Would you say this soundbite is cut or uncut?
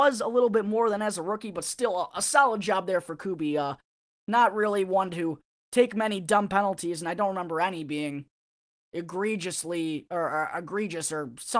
uncut